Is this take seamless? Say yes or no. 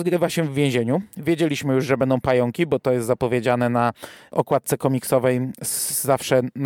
yes